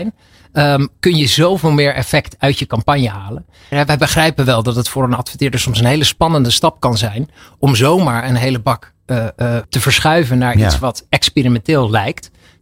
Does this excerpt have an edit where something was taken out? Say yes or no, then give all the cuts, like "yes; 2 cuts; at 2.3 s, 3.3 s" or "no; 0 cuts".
yes; 2 cuts; at 3.7 s, 9.6 s